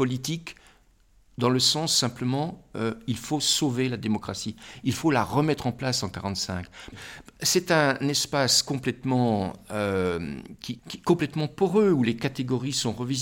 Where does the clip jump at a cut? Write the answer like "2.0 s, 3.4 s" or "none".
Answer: 6.9 s, 10.8 s